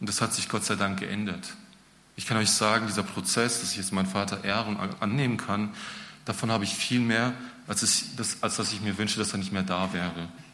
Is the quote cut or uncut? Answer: uncut